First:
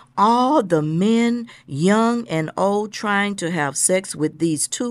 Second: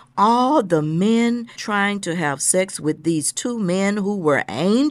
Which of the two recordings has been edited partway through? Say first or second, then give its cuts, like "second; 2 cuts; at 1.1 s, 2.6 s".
second; 1 cut; at 1.6 s